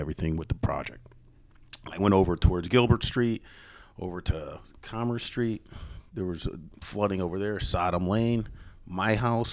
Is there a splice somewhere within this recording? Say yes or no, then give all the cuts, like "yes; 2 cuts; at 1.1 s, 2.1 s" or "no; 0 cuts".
no; 0 cuts